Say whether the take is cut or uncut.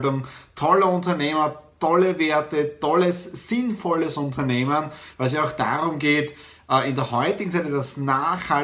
uncut